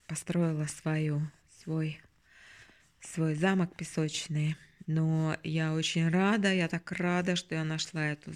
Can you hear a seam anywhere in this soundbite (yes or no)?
yes